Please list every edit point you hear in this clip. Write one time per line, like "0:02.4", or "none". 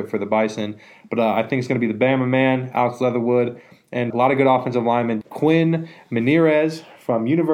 0:04.1
0:05.2